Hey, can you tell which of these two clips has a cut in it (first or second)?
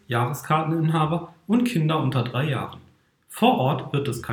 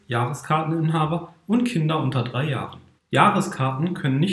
second